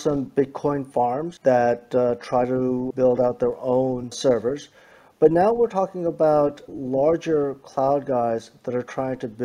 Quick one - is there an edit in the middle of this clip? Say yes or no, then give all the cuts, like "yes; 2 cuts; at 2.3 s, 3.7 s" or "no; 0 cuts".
yes; 1 cut; at 2.9 s